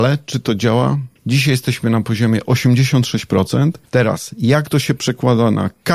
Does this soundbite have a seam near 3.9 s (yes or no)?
yes